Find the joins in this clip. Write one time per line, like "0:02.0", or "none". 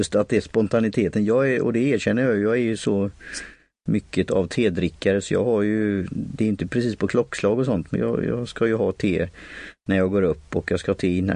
0:07.9

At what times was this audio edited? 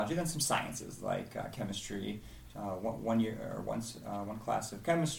none

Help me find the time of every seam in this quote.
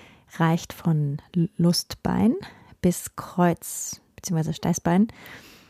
none

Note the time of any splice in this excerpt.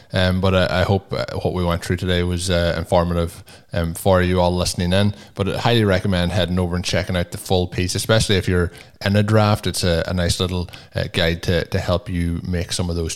none

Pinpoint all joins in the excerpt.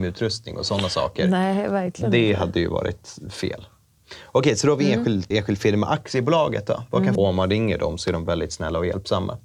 0:05.3
0:07.2

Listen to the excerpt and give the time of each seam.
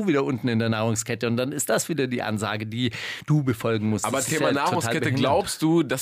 none

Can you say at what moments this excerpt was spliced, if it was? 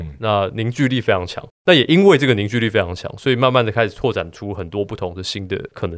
none

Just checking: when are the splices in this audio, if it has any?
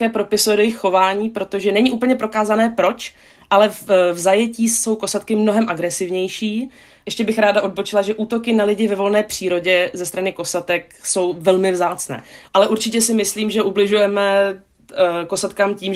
0:12.5

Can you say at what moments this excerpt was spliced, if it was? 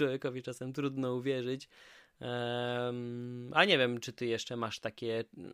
none

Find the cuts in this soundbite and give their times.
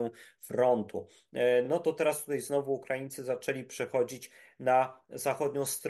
none

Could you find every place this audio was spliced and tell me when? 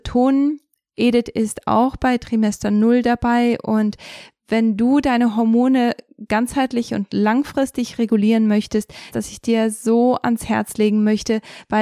0:09.1

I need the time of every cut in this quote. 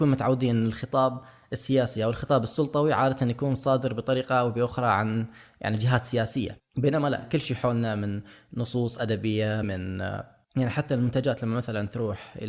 0:09.6

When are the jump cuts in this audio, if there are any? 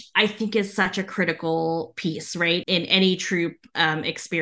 0:02.6

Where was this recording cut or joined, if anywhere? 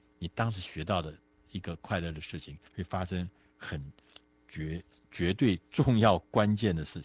0:02.7

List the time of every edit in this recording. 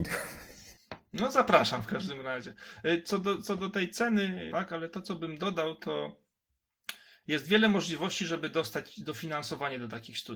0:04.5

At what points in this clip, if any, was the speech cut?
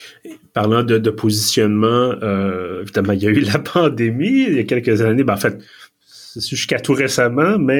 none

